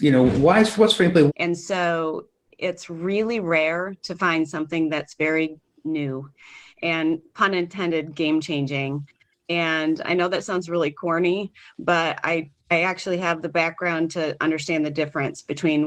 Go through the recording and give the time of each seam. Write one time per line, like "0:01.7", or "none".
0:01.3